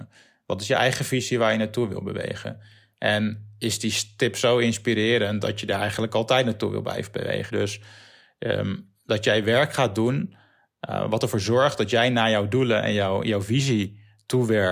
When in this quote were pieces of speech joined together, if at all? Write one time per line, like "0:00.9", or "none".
0:07.5

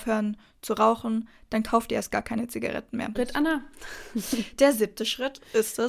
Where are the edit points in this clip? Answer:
0:03.1

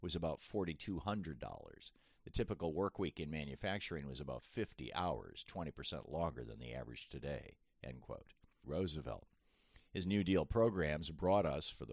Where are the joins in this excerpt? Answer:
0:08.6

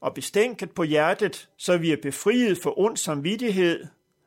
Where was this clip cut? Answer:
0:01.5

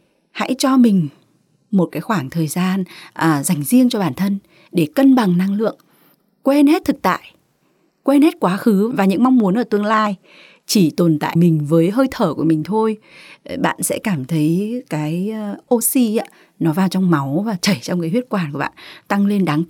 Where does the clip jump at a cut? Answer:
0:11.4

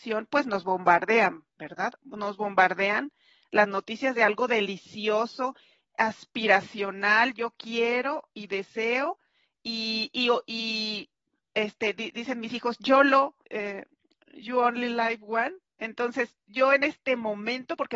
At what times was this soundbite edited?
0:13.4

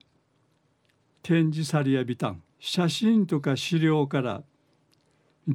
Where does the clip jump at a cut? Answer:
0:01.2
0:02.5

